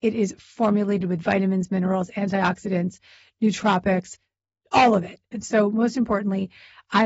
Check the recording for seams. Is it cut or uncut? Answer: cut